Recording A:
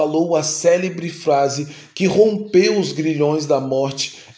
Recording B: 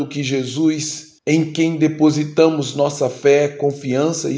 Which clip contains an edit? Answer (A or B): B